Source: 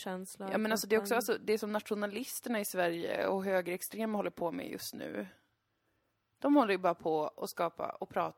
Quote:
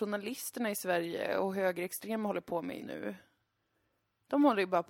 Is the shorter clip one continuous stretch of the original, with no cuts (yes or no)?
no